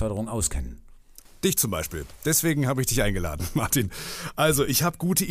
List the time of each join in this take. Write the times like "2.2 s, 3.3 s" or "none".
none